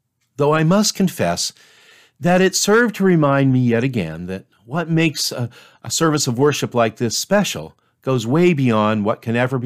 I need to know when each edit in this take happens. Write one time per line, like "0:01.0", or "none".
none